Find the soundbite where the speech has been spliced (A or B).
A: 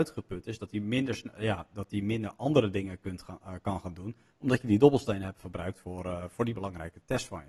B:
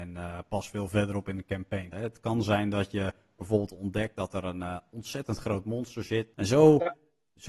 B